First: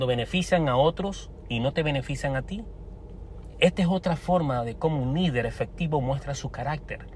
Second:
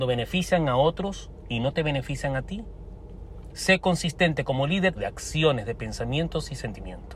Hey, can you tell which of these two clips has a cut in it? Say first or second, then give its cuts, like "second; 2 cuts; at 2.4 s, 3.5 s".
second; 2 cuts; at 3.5 s, 5.0 s